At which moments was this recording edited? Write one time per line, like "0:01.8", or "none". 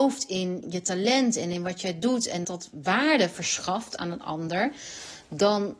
0:02.4

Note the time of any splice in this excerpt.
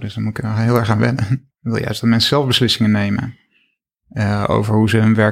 0:01.5

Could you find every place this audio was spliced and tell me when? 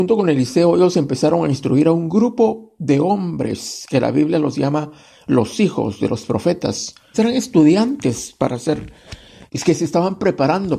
0:07.1
0:09.5

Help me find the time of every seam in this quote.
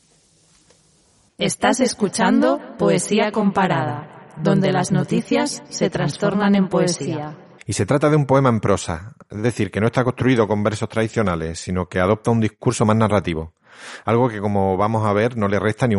0:01.3
0:07.6

